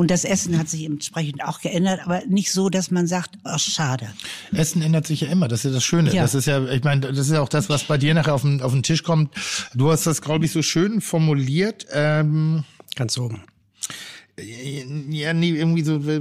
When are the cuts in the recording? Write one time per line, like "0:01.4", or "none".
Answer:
none